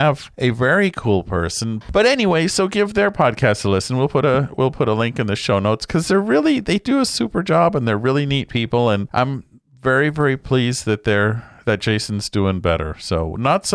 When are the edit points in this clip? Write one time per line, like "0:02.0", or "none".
0:01.8